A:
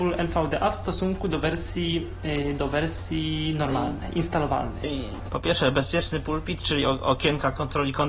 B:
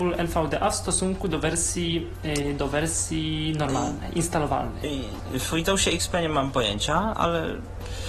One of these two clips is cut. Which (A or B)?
A